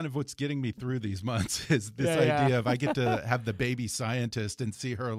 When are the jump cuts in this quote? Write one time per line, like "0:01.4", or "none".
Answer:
none